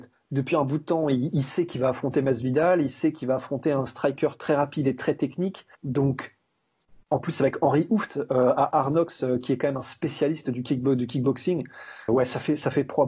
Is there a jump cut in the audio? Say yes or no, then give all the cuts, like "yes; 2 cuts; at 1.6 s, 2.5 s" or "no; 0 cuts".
yes; 2 cuts; at 5.7 s, 12.1 s